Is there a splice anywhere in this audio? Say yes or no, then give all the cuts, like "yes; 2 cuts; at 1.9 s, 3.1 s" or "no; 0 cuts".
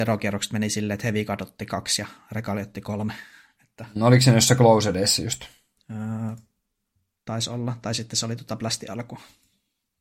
no; 0 cuts